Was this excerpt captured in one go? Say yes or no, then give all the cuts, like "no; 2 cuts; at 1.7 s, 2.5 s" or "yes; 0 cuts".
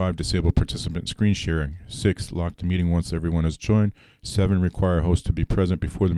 yes; 0 cuts